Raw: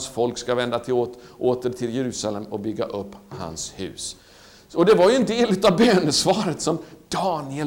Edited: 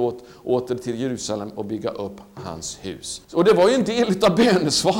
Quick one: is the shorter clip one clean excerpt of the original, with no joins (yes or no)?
no